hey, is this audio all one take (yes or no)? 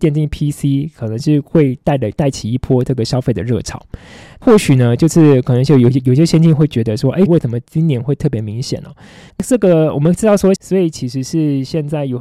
no